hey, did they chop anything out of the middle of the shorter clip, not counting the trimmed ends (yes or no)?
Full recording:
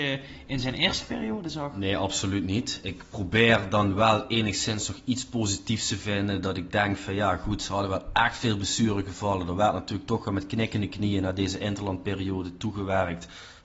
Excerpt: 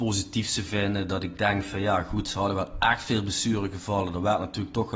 no